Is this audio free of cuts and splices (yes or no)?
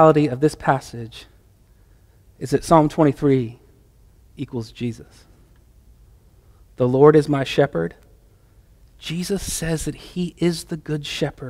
yes